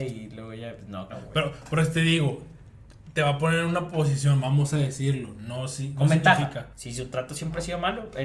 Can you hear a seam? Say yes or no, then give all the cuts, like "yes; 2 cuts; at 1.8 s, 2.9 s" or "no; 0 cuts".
yes; 2 cuts; at 1.1 s, 6.7 s